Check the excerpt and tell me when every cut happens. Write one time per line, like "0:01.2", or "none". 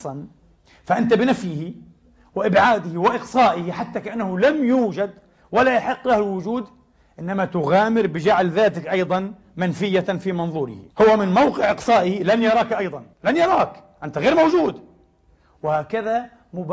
0:10.9
0:13.1